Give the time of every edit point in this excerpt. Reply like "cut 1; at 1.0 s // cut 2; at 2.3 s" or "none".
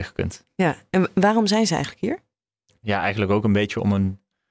none